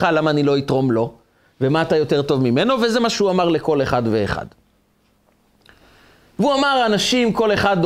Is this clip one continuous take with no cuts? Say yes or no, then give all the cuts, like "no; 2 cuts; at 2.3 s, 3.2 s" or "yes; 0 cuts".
yes; 0 cuts